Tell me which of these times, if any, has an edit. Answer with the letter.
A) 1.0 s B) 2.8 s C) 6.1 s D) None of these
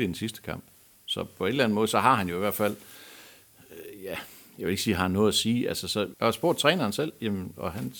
C